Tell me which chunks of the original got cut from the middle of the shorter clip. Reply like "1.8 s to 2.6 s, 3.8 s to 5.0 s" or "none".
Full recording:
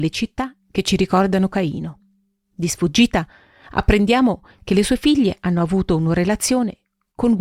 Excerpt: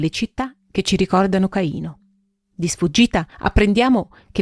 3.3 s to 3.6 s